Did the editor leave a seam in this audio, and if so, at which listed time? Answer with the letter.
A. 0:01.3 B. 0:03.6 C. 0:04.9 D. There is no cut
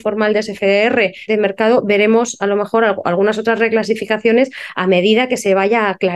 A